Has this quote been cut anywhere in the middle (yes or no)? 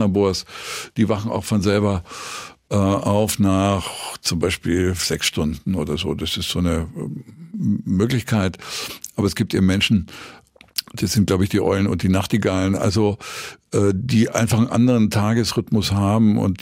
no